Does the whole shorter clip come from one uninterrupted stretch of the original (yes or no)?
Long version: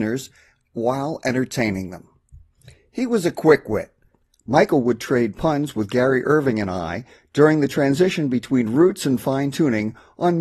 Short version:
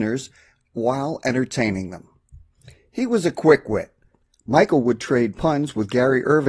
yes